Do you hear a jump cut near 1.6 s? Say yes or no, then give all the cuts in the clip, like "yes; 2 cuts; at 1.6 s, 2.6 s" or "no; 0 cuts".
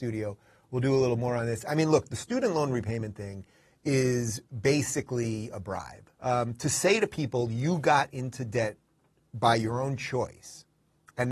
no; 1 cut; at 6.1 s